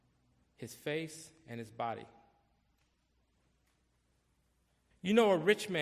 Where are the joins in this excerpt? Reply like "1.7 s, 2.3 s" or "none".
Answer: 4.9 s